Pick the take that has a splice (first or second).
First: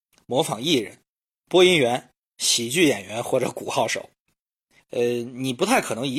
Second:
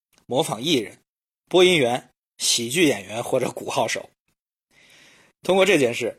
first